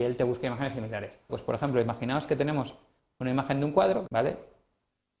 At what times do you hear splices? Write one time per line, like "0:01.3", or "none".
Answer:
0:01.3
0:04.0